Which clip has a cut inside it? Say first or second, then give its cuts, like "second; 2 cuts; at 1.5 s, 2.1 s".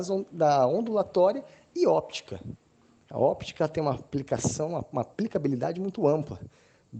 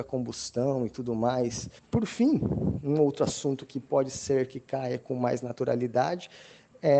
second; 1 cut; at 1.8 s